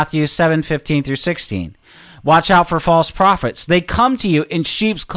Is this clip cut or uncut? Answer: uncut